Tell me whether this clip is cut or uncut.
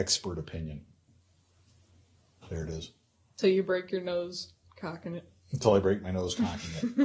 uncut